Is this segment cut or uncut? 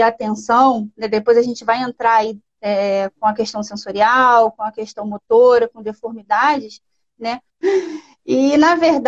cut